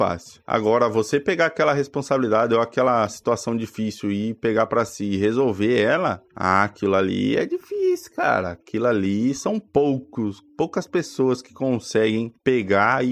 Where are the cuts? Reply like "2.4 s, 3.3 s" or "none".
none